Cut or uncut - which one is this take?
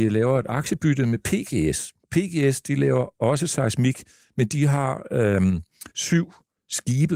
cut